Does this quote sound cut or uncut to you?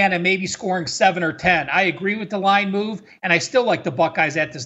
uncut